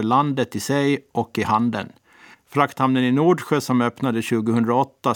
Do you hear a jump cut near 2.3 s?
yes; 1 cut; at 2.3 s

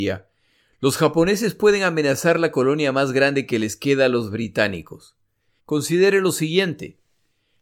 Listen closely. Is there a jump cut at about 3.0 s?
no; 1 cut; at 5.6 s

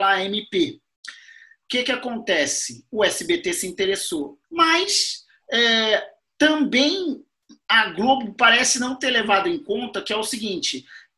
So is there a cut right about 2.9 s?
no; 1 cut; at 4.4 s

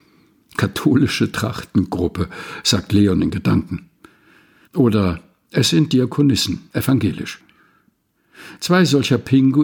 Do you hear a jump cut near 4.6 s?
yes; 1 cut; at 4.6 s

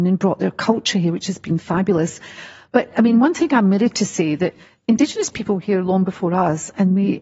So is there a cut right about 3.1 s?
no; 0 cuts

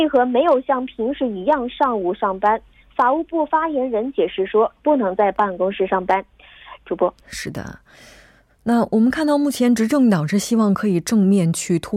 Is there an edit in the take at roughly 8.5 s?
no; 2 cuts; at 4.8 s, 6.8 s

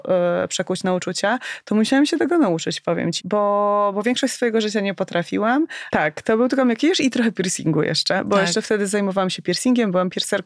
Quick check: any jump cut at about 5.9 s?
yes; 2 cuts; at 3.2 s, 5.9 s

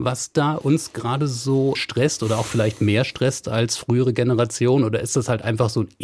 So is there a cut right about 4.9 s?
no; 1 cut; at 1.7 s

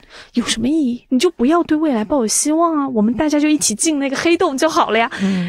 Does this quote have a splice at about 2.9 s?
no; 1 cut; at 1.1 s

